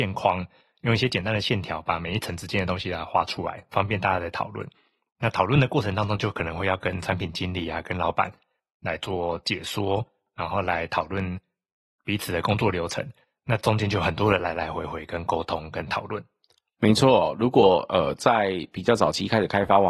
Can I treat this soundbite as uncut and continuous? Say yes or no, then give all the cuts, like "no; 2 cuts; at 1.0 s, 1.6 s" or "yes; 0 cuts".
yes; 0 cuts